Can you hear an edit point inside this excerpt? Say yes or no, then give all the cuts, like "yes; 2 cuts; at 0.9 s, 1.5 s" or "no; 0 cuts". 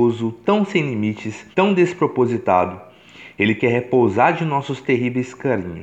yes; 1 cut; at 1.5 s